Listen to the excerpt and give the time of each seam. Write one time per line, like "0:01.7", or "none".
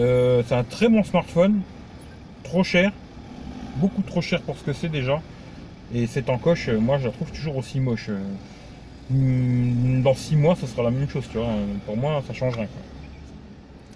none